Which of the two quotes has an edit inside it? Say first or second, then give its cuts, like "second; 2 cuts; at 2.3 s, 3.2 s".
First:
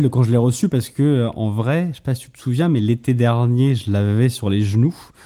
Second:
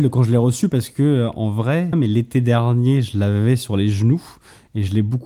second; 1 cut; at 1.9 s